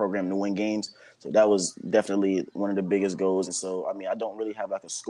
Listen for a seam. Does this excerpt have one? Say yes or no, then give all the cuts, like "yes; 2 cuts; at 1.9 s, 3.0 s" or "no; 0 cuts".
yes; 1 cut; at 3.5 s